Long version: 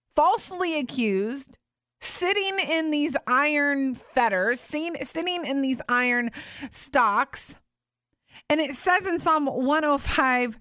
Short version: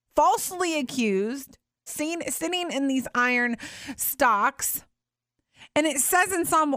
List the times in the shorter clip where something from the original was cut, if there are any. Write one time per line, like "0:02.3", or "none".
0:01.9